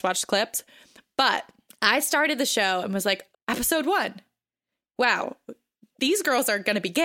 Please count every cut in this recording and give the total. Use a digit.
1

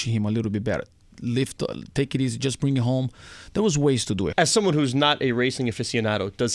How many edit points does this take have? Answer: 1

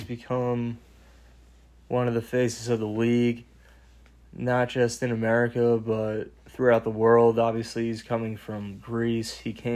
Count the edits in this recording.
0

